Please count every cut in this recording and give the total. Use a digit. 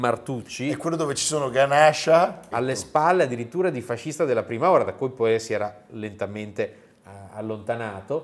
1